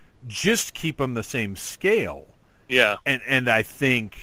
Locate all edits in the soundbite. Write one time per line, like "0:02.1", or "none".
none